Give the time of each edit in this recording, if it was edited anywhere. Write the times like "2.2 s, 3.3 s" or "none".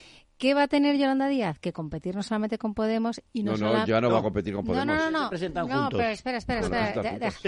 none